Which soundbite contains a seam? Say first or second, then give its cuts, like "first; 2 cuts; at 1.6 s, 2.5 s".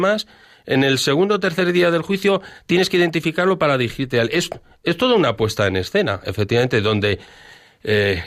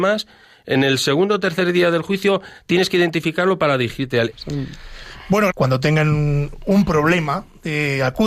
second; 2 cuts; at 4.3 s, 5.5 s